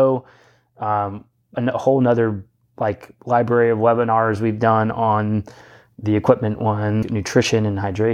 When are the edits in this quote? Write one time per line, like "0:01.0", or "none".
0:01.5
0:07.0